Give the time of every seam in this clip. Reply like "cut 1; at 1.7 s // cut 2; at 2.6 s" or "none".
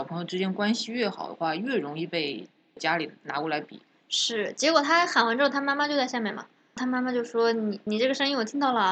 none